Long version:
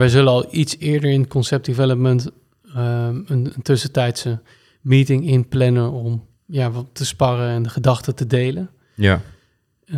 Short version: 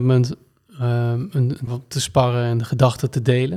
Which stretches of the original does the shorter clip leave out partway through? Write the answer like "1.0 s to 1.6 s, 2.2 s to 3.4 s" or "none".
3.6 s to 6.7 s